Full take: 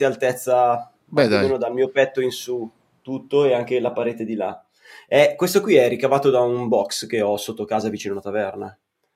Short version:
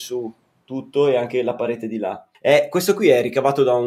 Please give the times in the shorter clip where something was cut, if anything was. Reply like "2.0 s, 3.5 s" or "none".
2.3 s

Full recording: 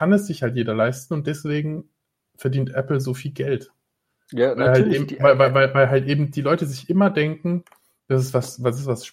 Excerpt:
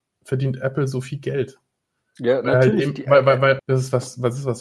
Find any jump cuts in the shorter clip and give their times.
3.6 s

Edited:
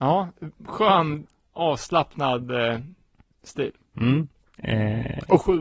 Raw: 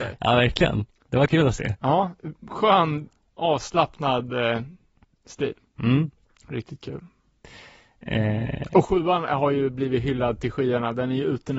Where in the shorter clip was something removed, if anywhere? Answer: 4.6 s

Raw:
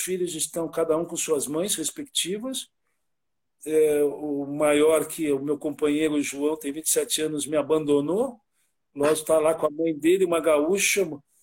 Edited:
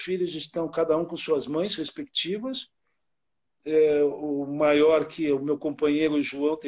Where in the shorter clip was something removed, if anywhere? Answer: none

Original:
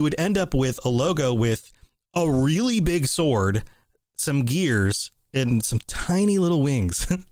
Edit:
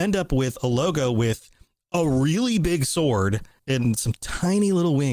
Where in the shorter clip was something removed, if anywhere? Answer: 3.6 s

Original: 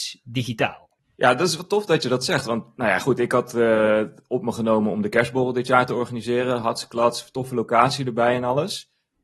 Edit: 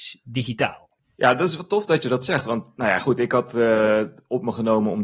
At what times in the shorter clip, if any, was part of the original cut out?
none

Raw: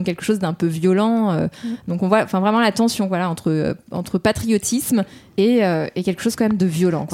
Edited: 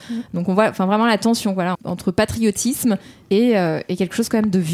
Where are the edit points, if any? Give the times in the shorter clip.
1.7 s

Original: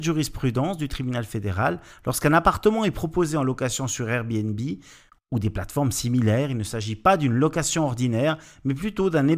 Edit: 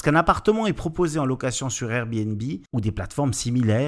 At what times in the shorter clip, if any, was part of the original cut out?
2.7 s

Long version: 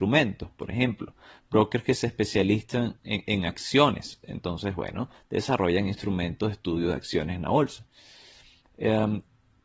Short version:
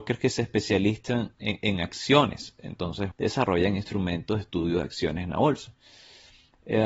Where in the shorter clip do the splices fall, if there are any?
3.1 s

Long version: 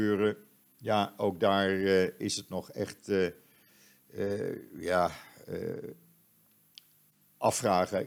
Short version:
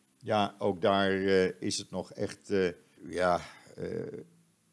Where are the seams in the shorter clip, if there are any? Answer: 3.0 s

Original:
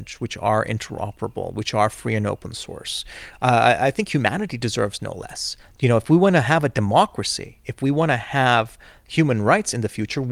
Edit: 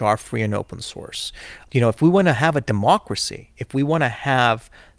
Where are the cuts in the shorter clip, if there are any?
1.7 s

